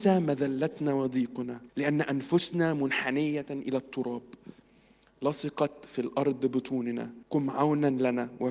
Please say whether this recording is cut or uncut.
cut